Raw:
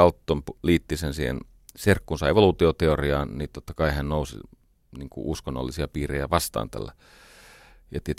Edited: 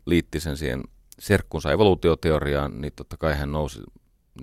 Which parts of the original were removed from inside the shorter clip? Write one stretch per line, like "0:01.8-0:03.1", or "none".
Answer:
none